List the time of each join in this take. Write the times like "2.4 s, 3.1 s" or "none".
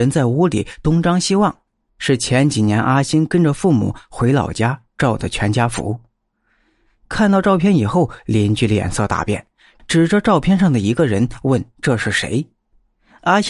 1.9 s